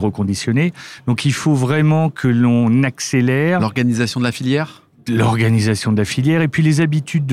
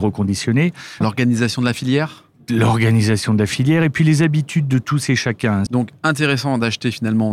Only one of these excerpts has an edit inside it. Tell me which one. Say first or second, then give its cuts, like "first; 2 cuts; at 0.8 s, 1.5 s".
second; 2 cuts; at 1.0 s, 5.7 s